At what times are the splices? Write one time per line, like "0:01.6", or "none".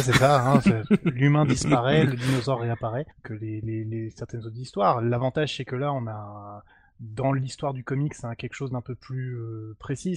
0:03.1